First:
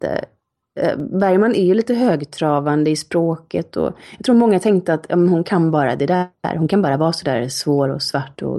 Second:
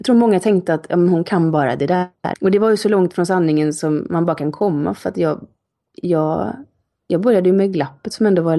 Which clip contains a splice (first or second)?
second